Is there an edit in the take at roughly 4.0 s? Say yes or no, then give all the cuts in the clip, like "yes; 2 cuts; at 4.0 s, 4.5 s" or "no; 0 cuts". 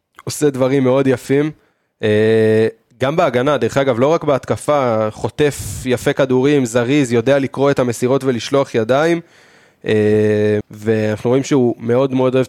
no; 1 cut; at 10.6 s